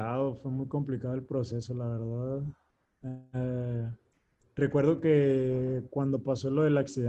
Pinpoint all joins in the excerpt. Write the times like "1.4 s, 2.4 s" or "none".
none